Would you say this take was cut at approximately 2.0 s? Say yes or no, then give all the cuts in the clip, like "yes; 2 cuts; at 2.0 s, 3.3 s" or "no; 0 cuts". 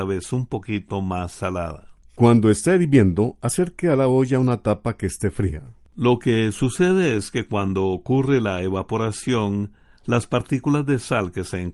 yes; 2 cuts; at 2.0 s, 5.9 s